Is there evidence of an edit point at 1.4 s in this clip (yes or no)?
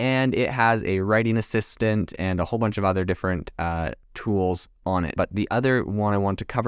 no